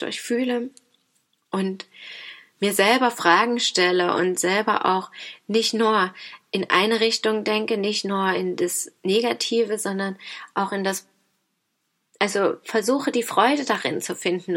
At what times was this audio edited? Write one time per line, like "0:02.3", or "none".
none